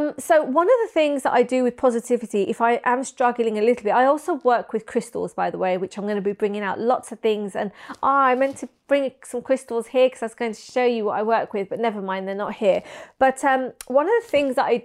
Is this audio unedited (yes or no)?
yes